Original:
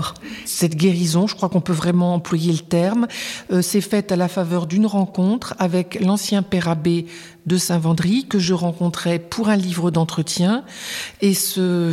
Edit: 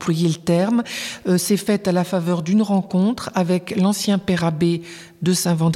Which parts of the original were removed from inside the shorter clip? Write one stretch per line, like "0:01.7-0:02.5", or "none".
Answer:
none